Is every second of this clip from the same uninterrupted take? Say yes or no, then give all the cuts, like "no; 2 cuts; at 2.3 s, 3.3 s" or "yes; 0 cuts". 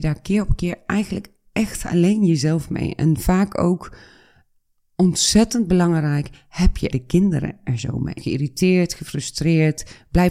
no; 2 cuts; at 6.9 s, 8.2 s